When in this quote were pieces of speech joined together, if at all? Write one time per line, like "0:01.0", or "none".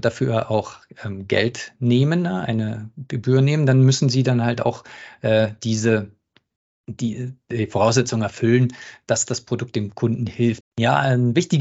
0:10.6